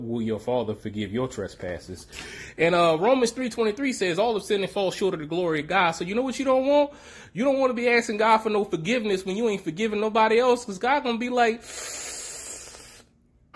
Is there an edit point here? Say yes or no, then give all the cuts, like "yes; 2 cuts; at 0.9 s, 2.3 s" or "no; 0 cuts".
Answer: no; 0 cuts